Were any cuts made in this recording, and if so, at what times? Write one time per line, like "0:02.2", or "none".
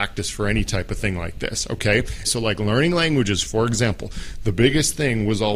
0:02.2